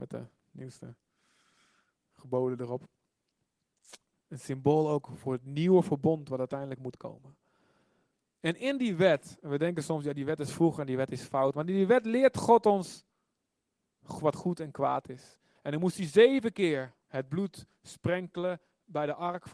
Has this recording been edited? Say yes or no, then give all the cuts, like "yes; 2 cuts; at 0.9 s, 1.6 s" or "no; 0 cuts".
yes; 3 cuts; at 4.1 s, 15.6 s, 17.0 s